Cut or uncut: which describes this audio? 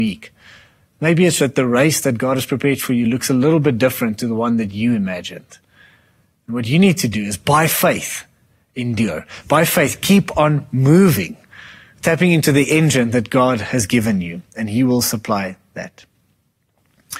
cut